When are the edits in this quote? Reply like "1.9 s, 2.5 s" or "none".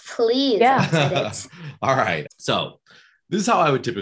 2.3 s